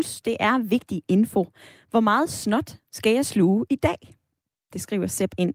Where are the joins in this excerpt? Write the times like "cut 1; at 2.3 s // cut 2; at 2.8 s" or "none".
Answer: none